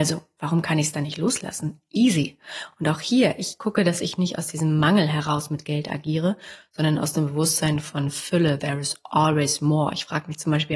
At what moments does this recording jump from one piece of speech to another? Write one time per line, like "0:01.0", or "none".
none